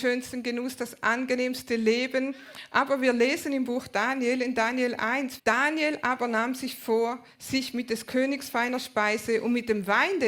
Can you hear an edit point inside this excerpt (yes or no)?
yes